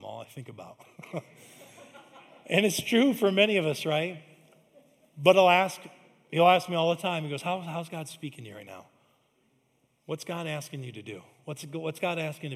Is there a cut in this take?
no; 0 cuts

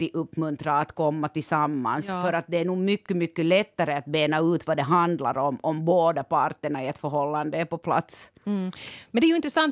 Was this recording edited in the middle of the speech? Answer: no; 0 cuts

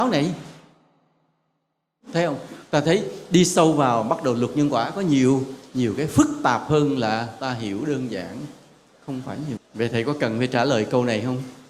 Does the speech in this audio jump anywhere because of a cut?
yes; 1 cut; at 9.6 s

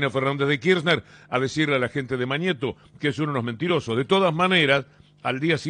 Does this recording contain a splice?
no; 0 cuts

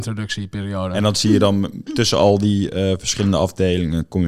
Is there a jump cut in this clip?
no; 0 cuts

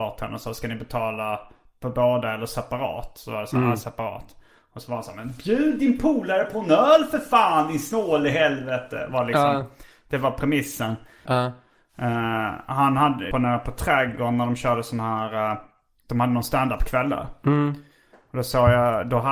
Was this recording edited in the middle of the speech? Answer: yes; 2 cuts; at 11.3 s, 13.3 s

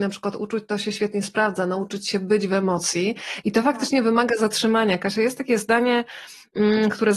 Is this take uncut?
yes; 0 cuts

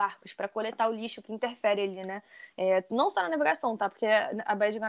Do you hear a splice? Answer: no; 0 cuts

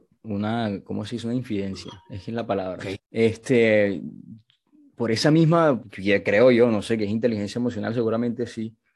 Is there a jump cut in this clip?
yes; 2 cuts; at 2.9 s, 5.8 s

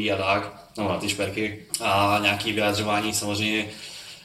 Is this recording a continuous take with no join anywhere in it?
no; 1 cut; at 1.7 s

